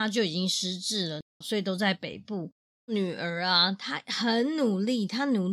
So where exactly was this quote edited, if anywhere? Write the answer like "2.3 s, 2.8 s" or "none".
1.4 s, 2.8 s